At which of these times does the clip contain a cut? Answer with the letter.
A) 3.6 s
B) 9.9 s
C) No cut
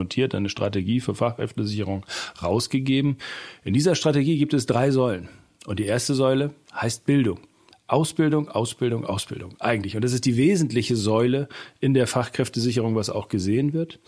C